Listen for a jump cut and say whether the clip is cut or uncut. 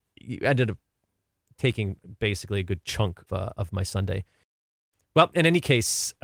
cut